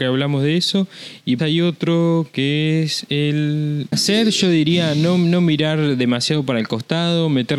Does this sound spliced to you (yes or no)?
yes